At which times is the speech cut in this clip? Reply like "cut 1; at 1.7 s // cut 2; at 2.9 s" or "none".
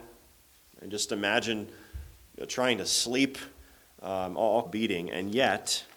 cut 1; at 4.6 s